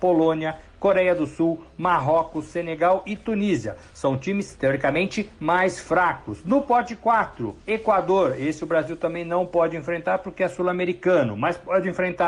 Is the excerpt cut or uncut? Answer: uncut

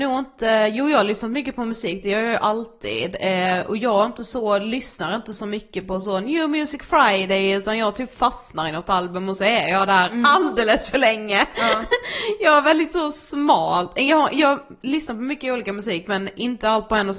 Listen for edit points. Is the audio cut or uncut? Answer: uncut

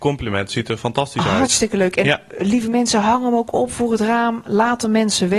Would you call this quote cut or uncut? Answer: uncut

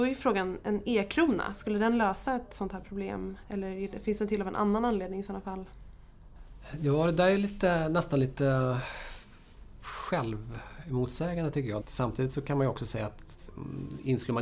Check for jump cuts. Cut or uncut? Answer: cut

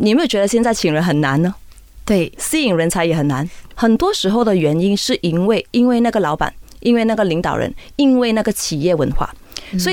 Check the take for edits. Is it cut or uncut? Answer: cut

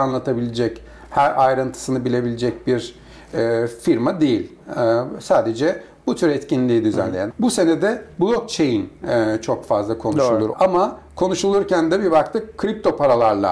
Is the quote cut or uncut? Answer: cut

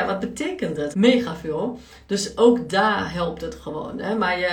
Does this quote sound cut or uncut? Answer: cut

